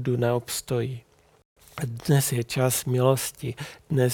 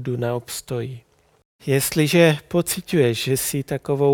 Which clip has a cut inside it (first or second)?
first